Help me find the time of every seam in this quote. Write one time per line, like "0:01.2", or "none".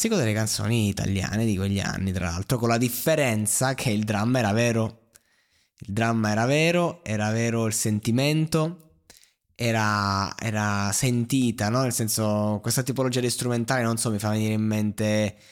none